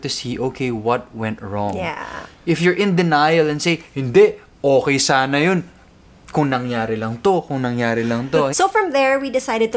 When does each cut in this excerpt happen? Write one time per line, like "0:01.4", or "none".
0:08.5